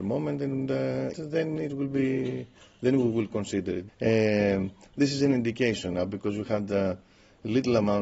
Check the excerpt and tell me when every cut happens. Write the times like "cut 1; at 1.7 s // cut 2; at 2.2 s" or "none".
cut 1; at 1.1 s // cut 2; at 3.9 s